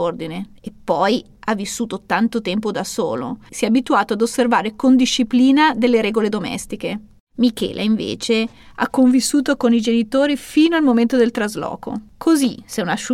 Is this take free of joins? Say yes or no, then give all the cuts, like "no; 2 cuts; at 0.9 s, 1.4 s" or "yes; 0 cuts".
no; 1 cut; at 3.5 s